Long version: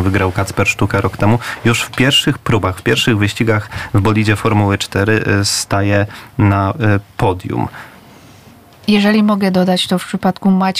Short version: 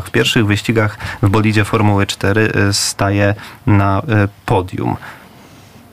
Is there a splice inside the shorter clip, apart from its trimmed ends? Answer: no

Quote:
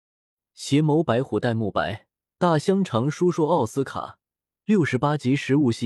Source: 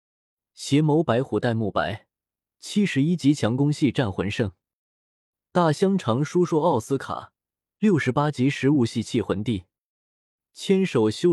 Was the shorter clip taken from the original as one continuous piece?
no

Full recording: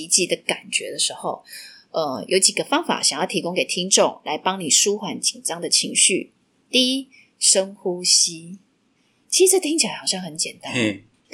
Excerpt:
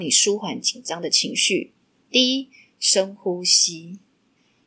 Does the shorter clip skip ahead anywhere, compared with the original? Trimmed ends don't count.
no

